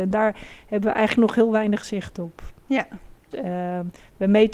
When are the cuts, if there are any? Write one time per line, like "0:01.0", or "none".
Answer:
0:03.3